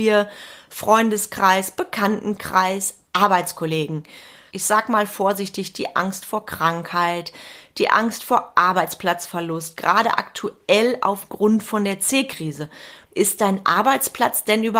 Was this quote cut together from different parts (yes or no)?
yes